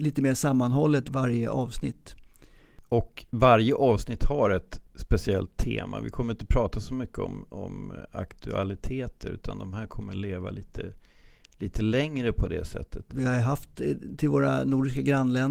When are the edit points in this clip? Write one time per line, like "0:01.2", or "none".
0:13.1